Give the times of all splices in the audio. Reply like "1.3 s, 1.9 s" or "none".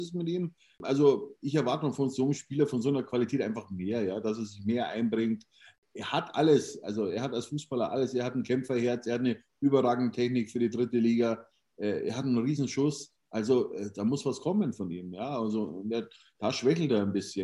none